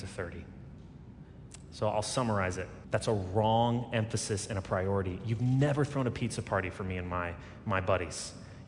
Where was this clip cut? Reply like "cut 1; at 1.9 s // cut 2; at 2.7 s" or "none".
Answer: cut 1; at 2.8 s